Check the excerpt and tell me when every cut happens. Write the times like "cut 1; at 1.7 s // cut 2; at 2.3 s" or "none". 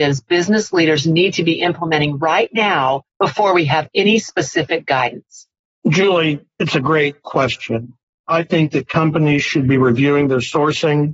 none